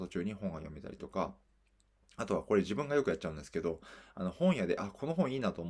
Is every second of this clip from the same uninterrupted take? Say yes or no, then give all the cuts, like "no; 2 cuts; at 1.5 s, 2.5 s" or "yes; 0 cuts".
yes; 0 cuts